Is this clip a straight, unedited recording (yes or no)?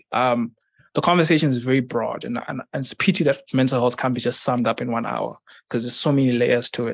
yes